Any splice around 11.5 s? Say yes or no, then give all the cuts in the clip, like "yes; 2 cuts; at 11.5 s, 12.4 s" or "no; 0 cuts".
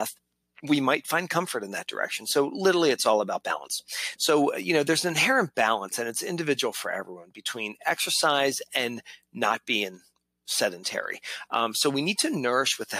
yes; 2 cuts; at 4.2 s, 11.5 s